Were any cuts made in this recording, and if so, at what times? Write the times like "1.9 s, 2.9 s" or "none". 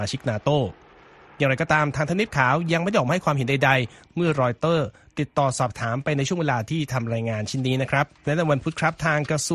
8.2 s